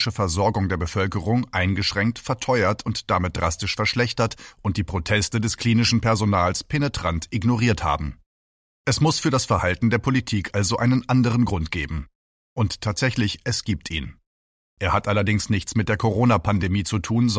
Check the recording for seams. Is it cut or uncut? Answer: uncut